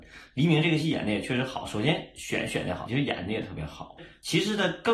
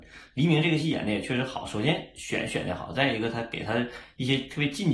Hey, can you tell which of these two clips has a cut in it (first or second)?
first